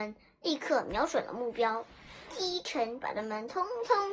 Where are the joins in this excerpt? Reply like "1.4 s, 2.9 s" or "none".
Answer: 3.0 s